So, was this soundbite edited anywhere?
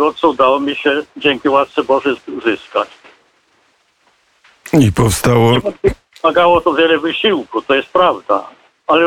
no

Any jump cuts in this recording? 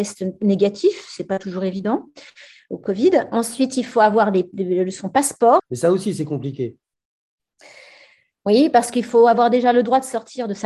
yes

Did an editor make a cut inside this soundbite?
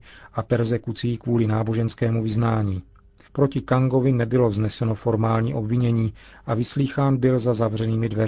yes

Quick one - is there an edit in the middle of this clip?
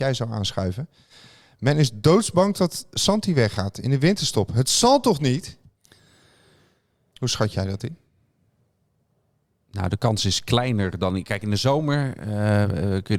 no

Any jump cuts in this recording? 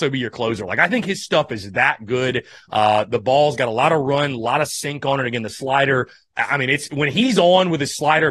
no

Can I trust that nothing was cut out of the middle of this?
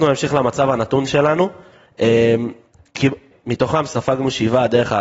no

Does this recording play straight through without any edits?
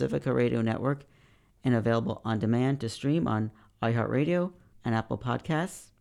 no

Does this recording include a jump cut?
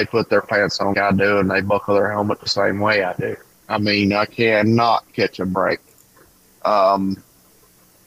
yes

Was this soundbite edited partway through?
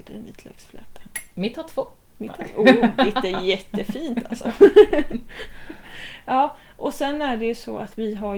no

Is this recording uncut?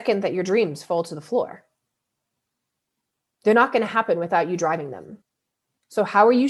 yes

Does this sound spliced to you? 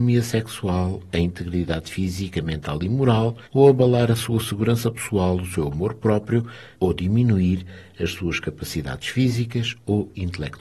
yes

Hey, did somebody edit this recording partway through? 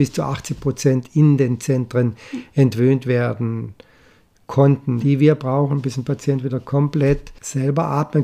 yes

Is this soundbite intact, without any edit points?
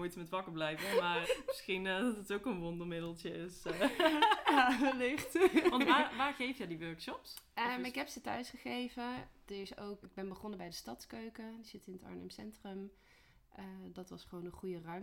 no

